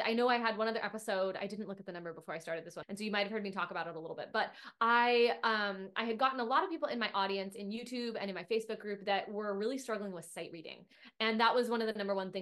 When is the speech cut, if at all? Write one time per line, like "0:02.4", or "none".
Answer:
0:02.8